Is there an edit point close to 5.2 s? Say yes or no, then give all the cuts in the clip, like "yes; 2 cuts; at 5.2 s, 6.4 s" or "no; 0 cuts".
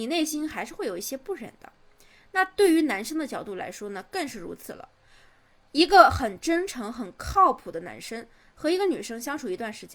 no; 0 cuts